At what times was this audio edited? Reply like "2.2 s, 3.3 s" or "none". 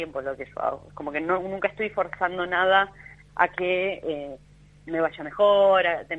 none